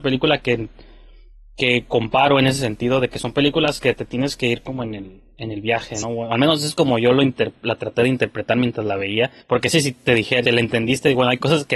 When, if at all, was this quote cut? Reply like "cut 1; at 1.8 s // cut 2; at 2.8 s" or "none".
cut 1; at 6.0 s // cut 2; at 9.4 s // cut 3; at 10.5 s